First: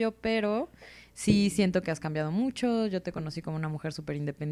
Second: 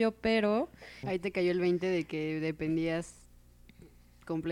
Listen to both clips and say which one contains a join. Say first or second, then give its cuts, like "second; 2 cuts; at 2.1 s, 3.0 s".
second; 1 cut; at 1.0 s